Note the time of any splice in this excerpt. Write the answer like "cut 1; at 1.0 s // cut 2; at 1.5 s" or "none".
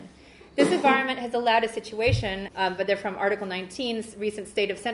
cut 1; at 2.5 s